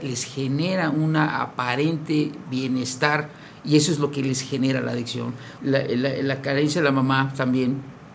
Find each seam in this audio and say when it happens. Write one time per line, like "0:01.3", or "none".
0:05.6